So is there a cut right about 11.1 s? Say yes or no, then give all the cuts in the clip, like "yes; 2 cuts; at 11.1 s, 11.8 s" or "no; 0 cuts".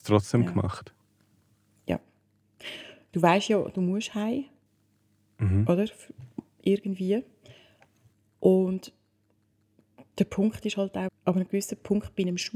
yes; 1 cut; at 11.1 s